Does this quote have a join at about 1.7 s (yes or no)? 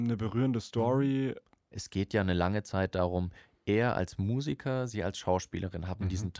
yes